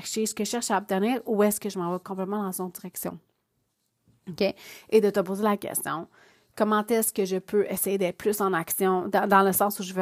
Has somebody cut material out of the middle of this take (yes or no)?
no